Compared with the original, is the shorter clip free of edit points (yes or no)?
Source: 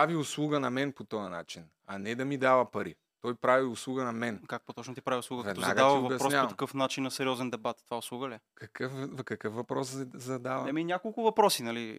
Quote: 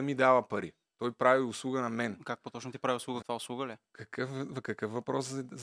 no